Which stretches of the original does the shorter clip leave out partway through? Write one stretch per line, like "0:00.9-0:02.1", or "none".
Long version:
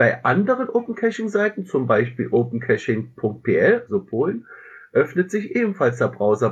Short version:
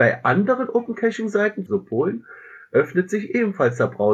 0:01.7-0:03.9